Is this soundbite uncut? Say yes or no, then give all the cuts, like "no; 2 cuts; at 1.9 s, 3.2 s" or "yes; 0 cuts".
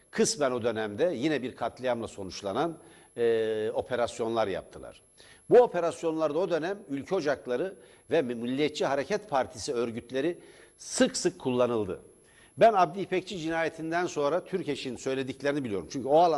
yes; 0 cuts